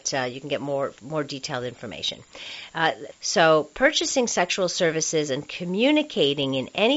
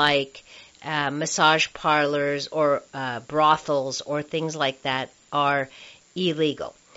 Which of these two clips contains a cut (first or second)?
first